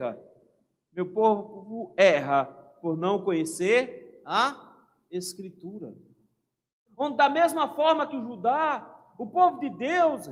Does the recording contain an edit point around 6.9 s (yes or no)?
yes